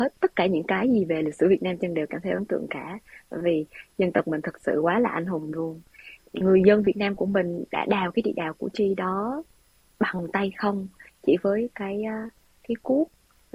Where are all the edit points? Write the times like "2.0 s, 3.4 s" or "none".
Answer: 6.2 s